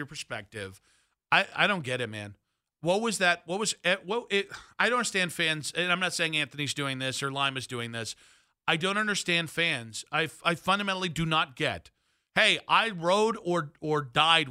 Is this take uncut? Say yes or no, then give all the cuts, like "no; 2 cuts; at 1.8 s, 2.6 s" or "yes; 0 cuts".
yes; 0 cuts